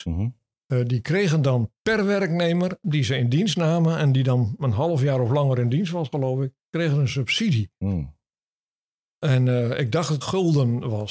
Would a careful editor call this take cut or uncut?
cut